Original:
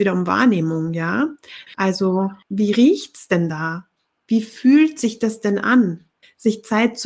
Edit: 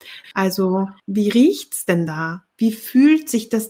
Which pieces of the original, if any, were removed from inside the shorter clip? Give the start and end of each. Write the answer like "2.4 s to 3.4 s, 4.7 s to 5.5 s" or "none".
3.9 s to 4.2 s